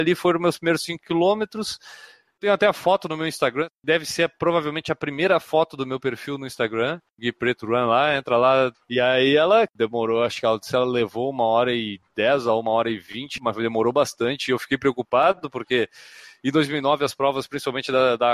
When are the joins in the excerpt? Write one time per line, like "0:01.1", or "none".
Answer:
0:08.7
0:13.4